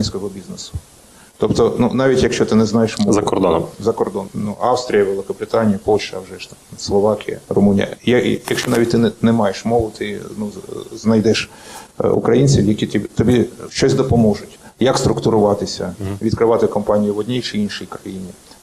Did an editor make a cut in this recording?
yes; 1 cut; at 7.4 s

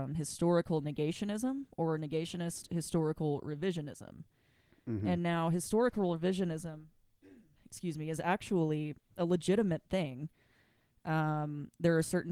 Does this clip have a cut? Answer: no; 0 cuts

